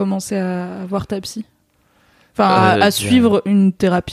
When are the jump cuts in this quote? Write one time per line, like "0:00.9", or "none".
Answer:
none